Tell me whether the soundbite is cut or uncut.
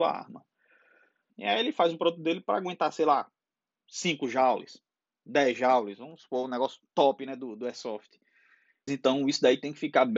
cut